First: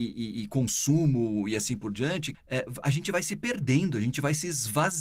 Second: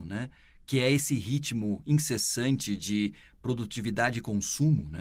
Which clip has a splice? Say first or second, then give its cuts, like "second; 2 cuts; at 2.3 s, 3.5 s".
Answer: first; 1 cut; at 2.3 s